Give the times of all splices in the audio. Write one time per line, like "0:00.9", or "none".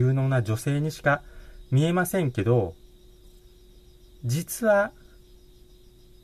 none